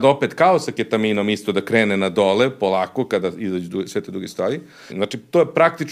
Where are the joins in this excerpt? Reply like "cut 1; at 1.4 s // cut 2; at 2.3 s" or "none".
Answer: cut 1; at 4.9 s

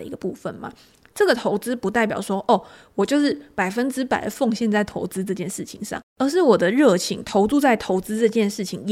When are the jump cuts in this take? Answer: none

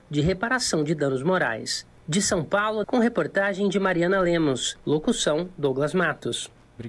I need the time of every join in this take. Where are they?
cut 1; at 2.8 s

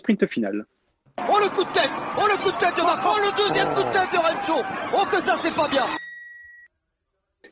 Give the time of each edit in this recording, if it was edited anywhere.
none

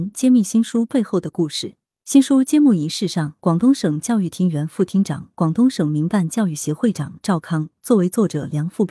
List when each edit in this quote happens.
cut 1; at 6.8 s

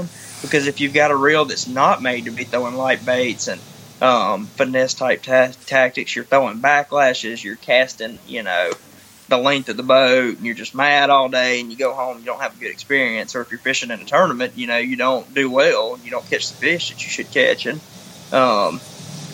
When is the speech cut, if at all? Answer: none

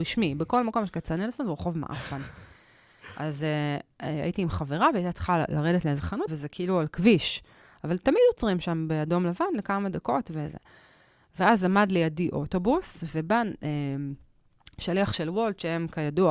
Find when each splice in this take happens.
cut 1; at 6.3 s

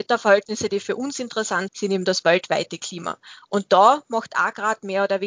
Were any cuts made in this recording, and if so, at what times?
cut 1; at 1.7 s

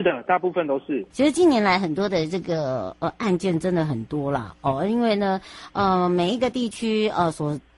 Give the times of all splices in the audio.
cut 1; at 1.1 s

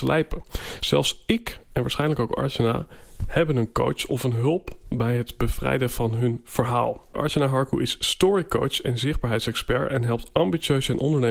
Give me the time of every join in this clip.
cut 1; at 7.1 s

